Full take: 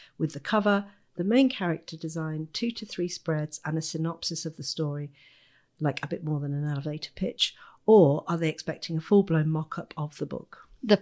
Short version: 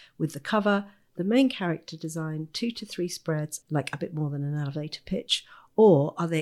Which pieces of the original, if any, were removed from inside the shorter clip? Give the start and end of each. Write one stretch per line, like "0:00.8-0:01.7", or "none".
0:03.6-0:05.7